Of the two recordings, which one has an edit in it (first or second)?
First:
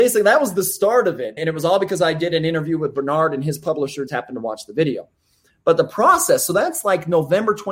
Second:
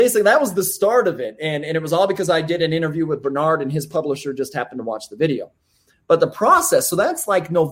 first